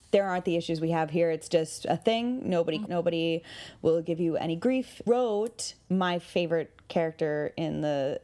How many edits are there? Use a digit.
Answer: 2